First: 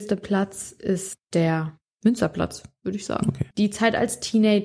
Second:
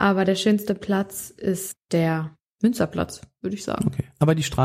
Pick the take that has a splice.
first; 1 cut; at 3.5 s

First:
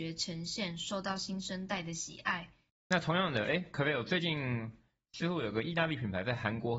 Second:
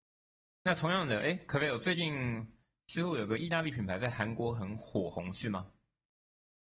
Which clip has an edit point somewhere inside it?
first; 1 cut; at 2.7 s

